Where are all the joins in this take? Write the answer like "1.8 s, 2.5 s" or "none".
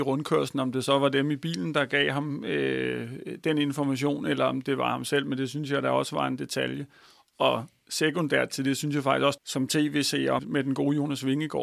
9.4 s, 10.4 s